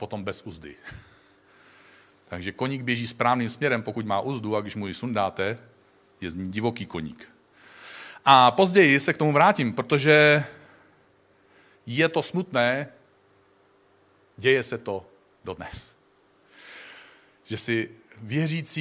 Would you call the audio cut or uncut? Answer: uncut